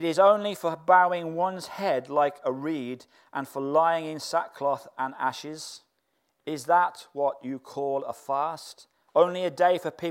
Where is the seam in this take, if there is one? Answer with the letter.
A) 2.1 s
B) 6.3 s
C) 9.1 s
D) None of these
C